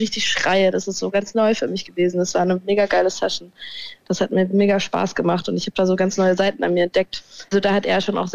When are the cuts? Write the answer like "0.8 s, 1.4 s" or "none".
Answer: none